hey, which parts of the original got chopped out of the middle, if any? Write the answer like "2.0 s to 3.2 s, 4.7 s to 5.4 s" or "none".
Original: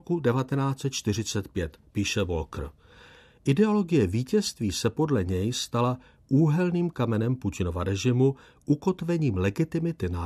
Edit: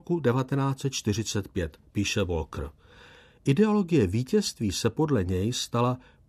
none